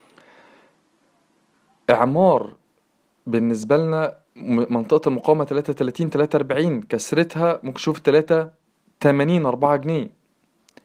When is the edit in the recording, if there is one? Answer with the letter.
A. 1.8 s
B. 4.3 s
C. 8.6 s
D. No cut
B